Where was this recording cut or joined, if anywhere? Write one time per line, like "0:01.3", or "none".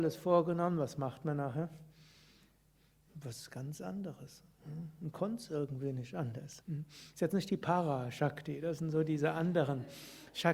0:06.6